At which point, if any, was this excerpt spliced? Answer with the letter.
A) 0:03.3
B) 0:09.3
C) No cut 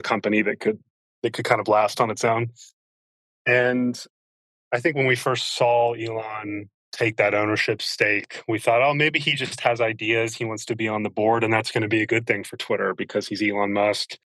C